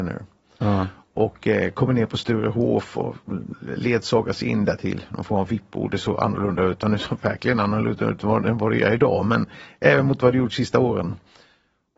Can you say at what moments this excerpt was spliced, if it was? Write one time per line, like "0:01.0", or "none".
none